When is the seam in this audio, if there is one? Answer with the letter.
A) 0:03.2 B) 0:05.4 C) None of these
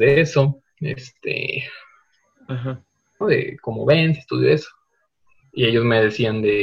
A